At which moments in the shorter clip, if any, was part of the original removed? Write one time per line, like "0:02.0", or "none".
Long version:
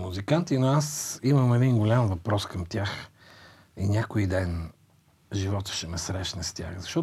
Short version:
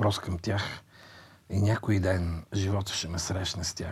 0:02.5